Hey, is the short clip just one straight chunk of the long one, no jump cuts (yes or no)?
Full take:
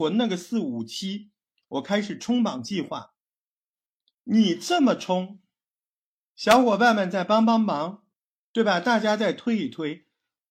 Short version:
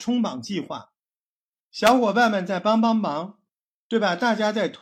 no